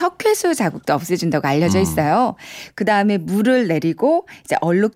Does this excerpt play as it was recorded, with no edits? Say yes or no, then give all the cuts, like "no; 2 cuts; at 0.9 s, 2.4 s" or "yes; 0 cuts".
no; 1 cut; at 2.7 s